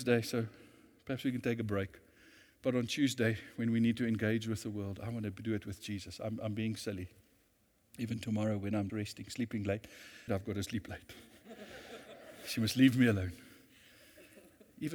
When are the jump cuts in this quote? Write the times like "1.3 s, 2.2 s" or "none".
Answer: 8.9 s, 10.3 s